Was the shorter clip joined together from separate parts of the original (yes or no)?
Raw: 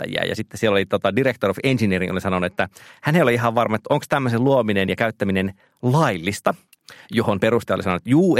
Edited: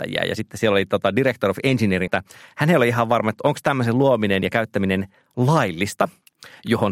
yes